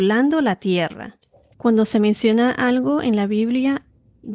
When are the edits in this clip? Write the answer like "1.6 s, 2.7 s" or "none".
1.5 s

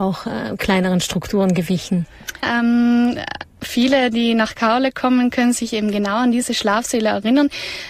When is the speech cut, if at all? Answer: 2.4 s

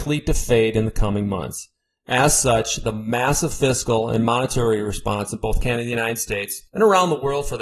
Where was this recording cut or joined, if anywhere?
none

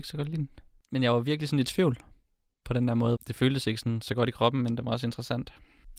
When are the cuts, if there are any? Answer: 3.2 s

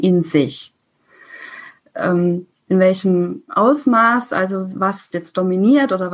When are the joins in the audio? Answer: none

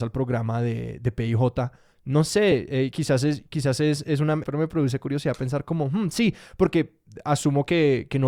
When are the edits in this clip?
4.4 s

